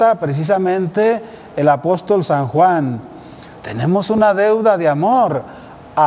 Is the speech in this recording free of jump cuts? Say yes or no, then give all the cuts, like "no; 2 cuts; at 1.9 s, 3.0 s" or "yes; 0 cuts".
no; 1 cut; at 3.6 s